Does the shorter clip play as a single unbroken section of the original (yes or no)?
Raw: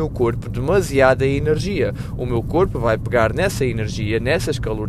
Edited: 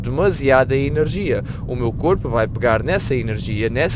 yes